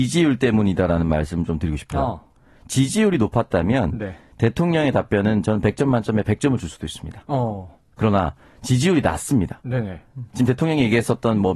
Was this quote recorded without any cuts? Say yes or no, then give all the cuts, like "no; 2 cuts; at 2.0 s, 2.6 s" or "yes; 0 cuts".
yes; 0 cuts